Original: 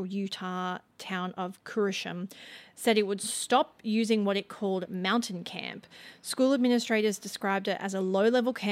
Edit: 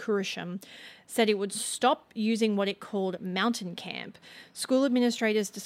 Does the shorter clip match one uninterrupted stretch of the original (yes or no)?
yes